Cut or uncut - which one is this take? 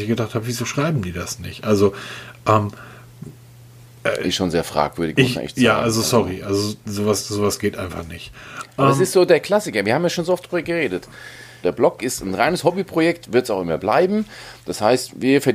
cut